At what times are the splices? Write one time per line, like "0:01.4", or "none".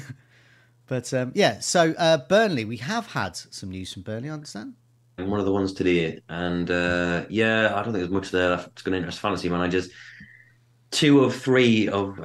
0:05.2